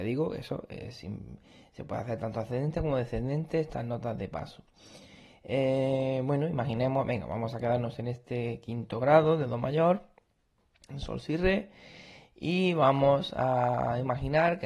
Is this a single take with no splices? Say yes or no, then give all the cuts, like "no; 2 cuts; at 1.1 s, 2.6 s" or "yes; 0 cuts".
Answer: yes; 0 cuts